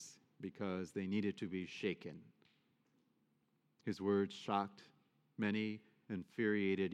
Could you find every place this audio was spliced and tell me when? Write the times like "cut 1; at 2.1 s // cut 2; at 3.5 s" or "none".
none